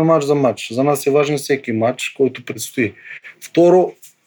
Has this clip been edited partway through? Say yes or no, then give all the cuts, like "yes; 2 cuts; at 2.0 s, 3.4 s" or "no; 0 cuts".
no; 0 cuts